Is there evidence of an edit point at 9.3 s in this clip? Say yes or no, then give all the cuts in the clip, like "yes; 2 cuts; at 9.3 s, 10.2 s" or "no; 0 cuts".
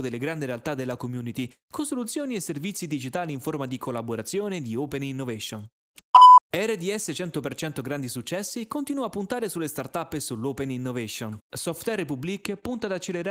no; 2 cuts; at 6.4 s, 11.4 s